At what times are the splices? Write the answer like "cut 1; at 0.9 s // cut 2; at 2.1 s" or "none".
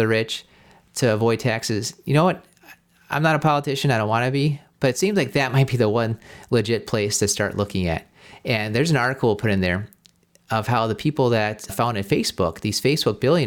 none